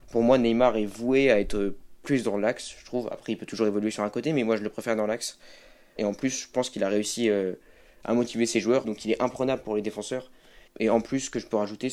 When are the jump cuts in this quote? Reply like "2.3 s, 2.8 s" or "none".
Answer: 6.0 s, 8.8 s, 10.7 s

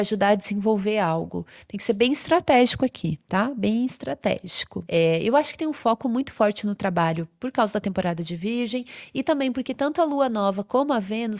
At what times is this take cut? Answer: none

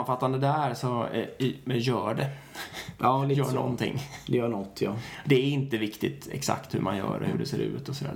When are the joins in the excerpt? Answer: none

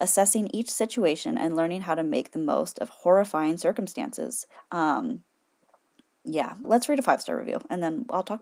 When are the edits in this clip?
4.6 s, 6.6 s

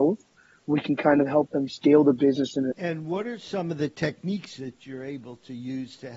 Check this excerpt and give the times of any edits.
2.7 s

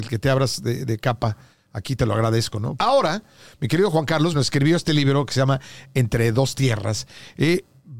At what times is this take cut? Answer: 2.8 s, 4.3 s

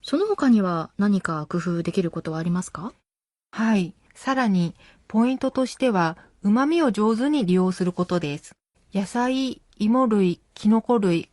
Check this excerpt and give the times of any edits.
8.7 s

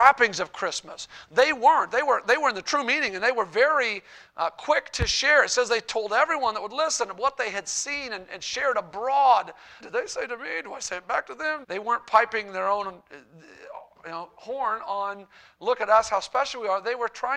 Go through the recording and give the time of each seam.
9.8 s, 11.6 s

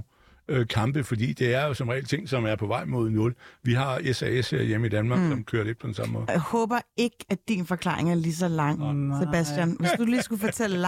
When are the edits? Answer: none

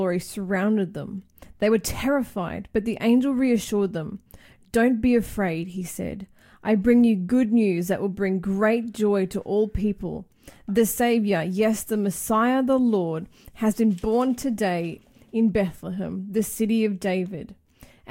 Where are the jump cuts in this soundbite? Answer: none

